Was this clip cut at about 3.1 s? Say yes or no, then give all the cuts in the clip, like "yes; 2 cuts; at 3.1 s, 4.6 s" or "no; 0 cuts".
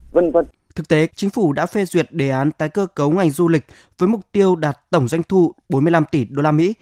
no; 1 cut; at 1.1 s